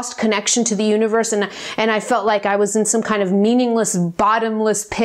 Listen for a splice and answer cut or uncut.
cut